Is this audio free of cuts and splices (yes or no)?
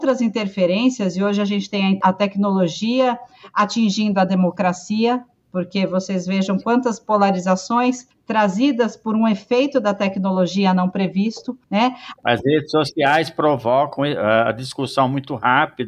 yes